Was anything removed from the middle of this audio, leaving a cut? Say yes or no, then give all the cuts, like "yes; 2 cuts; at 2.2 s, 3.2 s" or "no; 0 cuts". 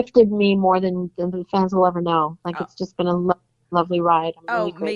no; 0 cuts